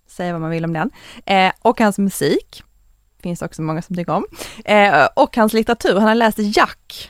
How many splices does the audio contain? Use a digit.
0